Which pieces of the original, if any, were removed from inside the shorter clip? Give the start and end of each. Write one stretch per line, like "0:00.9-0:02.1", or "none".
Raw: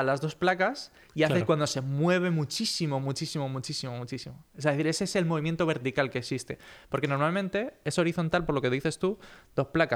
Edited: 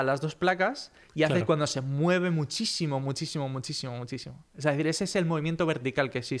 none